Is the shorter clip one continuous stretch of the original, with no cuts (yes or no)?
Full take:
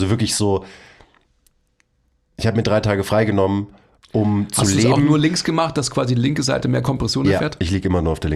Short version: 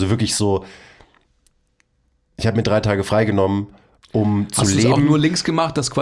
yes